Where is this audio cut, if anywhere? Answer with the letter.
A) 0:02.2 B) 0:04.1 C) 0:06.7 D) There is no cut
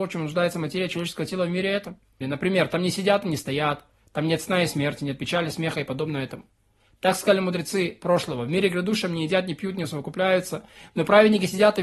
A